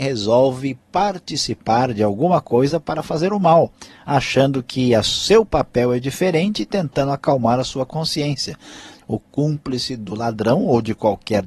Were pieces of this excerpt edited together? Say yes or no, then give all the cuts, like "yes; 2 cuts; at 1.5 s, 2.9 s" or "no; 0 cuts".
yes; 1 cut; at 9.0 s